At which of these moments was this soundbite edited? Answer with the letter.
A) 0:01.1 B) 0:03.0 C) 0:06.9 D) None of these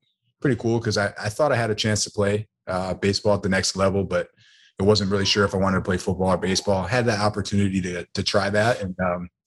D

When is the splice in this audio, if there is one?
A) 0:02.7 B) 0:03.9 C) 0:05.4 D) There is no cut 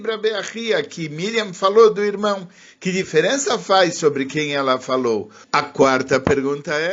C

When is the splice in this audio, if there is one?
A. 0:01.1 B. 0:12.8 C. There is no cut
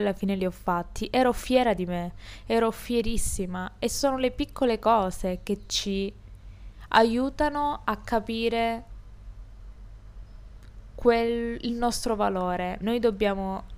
B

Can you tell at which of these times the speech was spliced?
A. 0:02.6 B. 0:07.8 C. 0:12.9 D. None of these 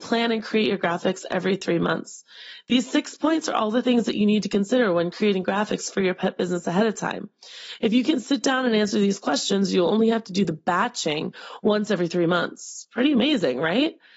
D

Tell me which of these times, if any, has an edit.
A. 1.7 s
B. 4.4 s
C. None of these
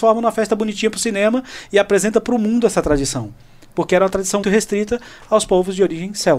B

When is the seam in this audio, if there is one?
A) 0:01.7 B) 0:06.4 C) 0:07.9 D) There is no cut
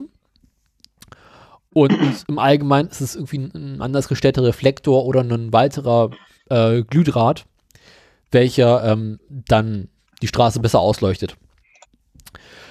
A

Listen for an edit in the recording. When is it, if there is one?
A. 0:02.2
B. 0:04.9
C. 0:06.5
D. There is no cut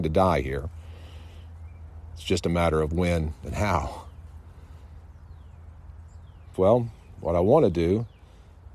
C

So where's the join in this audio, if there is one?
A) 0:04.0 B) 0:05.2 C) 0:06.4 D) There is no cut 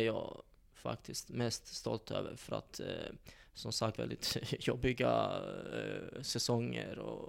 A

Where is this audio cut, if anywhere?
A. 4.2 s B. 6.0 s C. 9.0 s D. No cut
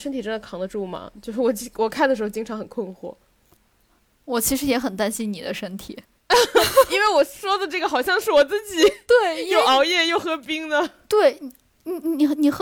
B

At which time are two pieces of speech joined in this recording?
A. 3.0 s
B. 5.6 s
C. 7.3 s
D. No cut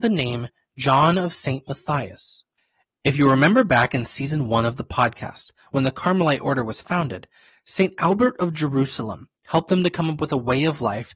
D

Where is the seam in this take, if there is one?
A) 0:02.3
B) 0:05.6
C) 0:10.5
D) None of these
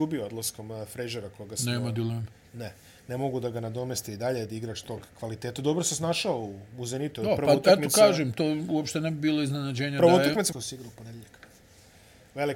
C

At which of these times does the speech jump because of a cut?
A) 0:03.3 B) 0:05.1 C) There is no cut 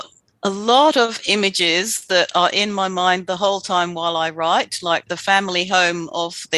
B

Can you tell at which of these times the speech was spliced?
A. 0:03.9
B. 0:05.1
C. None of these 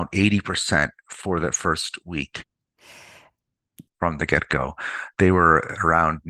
A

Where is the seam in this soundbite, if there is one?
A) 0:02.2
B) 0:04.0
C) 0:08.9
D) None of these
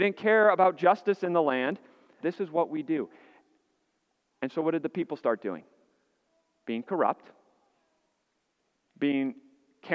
A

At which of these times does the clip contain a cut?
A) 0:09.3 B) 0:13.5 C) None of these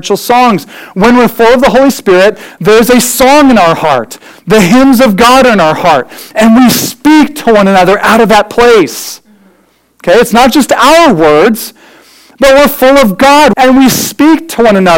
B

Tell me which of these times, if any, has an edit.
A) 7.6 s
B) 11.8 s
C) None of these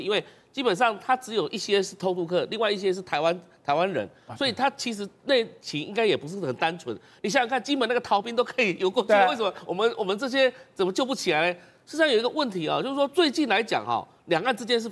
C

